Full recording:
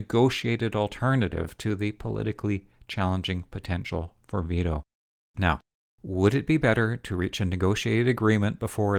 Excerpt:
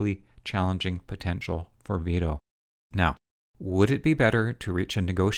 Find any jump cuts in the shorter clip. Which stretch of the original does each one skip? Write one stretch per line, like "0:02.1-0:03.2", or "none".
none